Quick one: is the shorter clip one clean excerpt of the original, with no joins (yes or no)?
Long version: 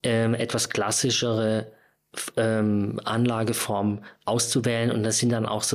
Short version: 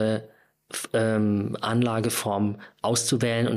yes